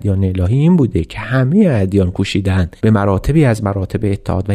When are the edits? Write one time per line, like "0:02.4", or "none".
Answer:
0:02.8